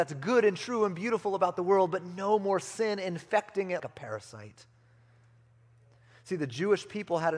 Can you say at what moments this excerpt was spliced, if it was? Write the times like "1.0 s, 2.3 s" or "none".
3.8 s